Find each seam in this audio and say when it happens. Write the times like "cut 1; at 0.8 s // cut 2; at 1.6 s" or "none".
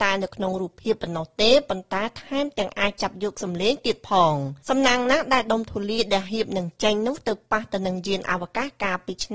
cut 1; at 4.6 s